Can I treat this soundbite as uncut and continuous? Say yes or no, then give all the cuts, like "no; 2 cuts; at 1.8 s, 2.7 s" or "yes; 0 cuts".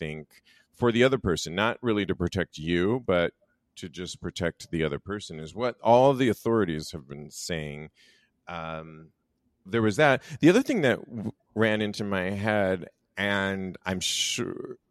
no; 1 cut; at 9.7 s